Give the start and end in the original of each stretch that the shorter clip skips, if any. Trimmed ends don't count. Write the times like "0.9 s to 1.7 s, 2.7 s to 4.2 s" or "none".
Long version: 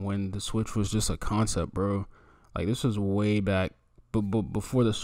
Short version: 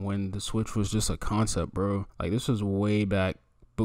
2.1 s to 2.4 s